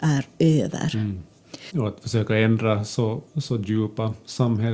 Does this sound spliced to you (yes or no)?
yes